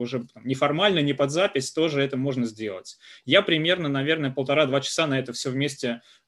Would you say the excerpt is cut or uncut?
uncut